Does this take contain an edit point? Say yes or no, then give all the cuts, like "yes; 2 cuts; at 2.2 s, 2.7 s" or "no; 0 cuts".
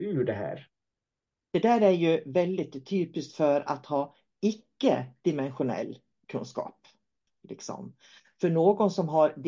yes; 1 cut; at 7.3 s